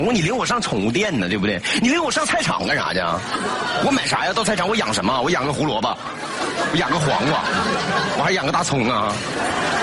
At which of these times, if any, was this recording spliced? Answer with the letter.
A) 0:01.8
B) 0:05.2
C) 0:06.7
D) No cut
D